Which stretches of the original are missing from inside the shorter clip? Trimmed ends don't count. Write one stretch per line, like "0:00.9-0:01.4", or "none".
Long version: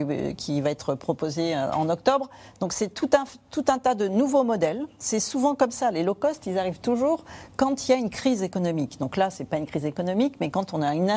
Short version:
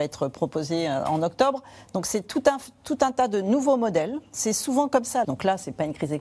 0:05.9-0:09.0